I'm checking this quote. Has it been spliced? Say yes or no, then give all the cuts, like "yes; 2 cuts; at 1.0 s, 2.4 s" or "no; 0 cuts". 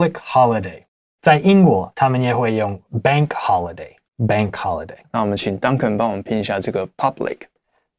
yes; 1 cut; at 5.0 s